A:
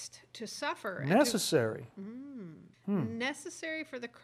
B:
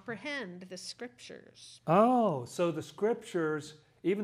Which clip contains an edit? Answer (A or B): A